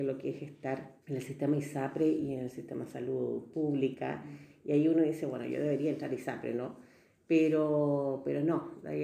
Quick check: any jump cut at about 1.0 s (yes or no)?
yes